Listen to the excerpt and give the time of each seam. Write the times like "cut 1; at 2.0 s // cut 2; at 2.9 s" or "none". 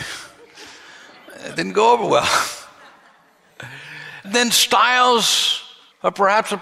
none